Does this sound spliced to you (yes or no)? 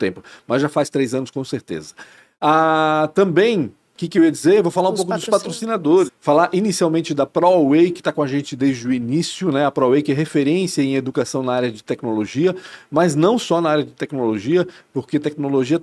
yes